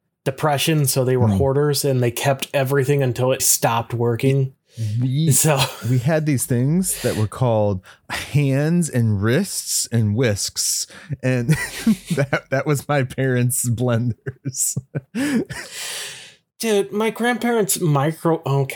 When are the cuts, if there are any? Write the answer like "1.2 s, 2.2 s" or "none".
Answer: 3.4 s